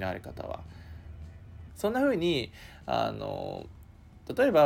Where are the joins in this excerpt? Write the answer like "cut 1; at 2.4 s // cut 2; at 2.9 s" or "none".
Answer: cut 1; at 1.7 s